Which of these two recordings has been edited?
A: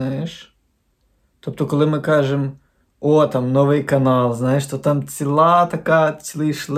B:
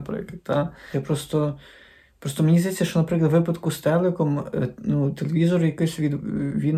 B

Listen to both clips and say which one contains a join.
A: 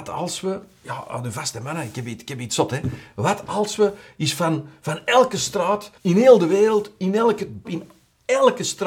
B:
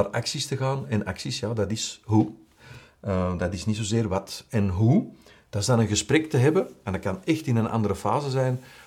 A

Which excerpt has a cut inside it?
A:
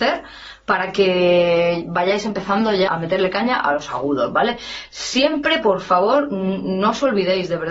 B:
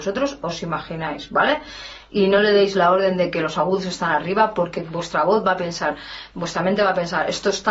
A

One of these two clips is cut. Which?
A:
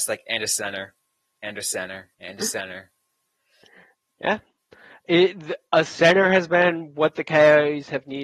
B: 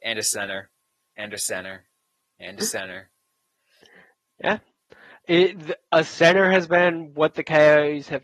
A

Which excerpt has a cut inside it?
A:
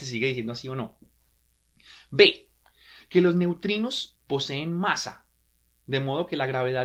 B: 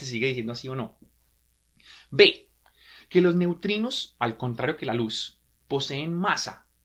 A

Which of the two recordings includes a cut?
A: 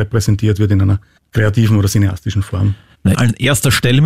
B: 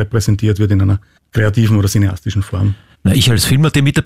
A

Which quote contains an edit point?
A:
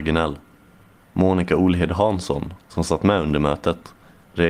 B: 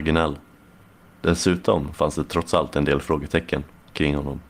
A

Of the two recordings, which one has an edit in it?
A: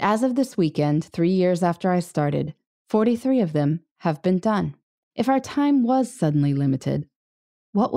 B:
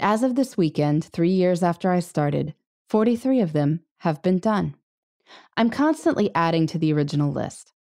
A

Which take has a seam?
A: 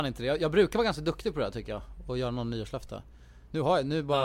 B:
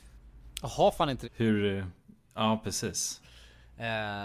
B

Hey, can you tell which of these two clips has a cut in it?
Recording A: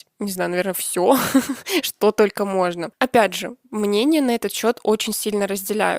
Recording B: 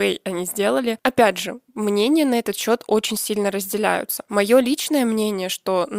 B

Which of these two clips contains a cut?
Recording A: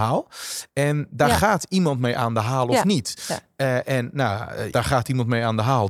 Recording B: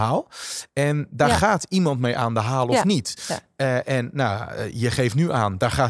A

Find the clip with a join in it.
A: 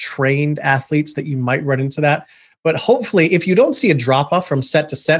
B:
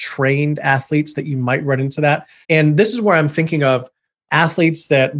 B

